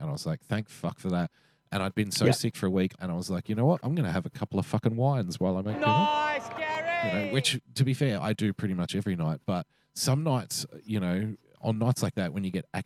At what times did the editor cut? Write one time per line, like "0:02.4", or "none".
0:03.0